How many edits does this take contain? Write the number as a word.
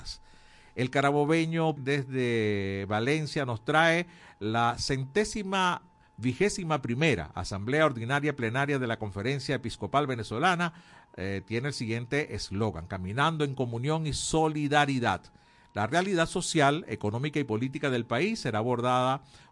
one